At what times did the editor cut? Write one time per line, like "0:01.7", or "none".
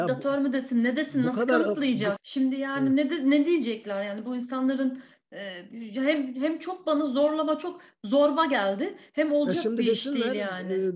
0:02.2